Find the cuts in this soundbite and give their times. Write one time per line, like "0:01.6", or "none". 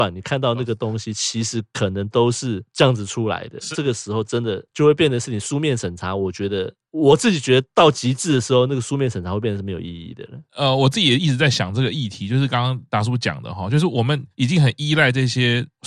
0:03.7